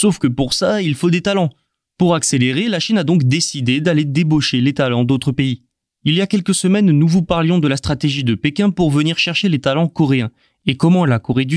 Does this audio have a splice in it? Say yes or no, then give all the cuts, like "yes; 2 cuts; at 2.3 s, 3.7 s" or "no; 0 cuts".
no; 0 cuts